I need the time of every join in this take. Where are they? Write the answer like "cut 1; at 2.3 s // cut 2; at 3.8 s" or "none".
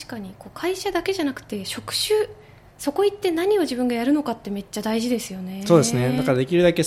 none